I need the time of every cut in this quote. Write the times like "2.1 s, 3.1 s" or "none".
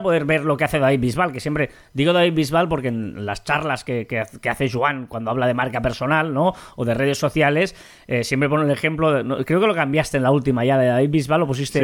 none